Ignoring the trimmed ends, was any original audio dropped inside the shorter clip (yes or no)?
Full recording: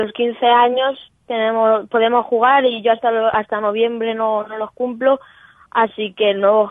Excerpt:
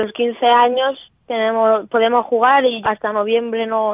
yes